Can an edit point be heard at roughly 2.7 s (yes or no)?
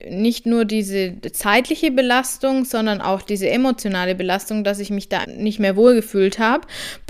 no